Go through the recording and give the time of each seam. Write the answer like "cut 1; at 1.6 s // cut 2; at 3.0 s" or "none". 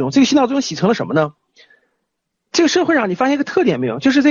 cut 1; at 2.5 s